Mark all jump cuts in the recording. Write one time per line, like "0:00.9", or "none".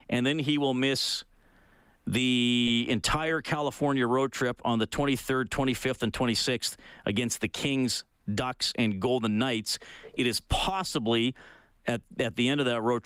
none

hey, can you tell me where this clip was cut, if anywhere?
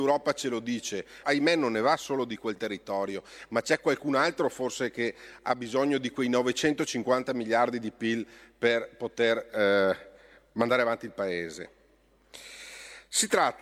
0:01.2

